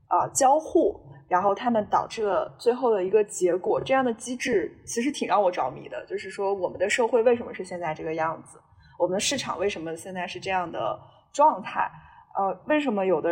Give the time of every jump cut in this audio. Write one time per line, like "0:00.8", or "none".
none